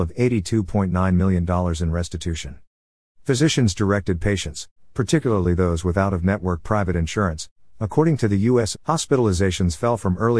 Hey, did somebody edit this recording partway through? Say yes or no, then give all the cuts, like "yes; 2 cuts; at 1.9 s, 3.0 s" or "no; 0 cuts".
yes; 2 cuts; at 7.7 s, 8.7 s